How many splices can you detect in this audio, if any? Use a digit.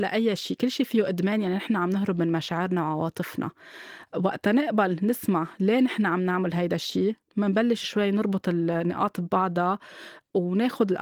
1